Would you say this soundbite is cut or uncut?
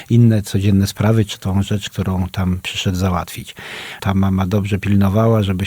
cut